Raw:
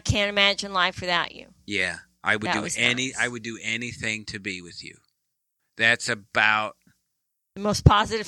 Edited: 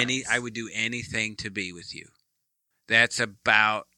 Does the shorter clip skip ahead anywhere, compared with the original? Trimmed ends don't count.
no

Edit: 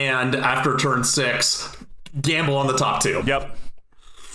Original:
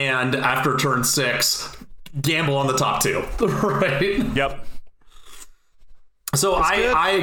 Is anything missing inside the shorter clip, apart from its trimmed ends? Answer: yes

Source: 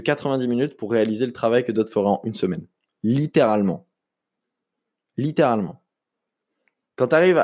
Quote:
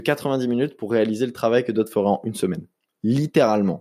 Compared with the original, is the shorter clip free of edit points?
yes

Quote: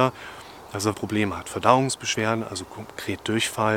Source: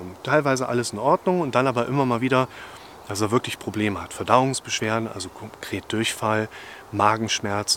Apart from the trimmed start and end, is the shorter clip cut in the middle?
yes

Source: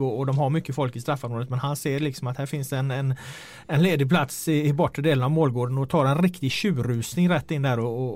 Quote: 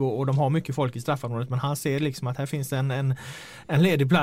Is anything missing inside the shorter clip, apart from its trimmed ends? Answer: no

